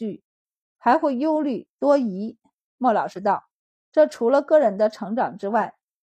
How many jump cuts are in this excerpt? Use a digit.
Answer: 0